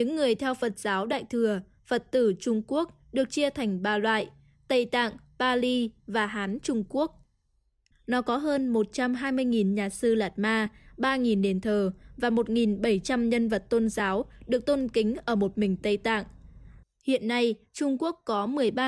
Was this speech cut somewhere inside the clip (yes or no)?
yes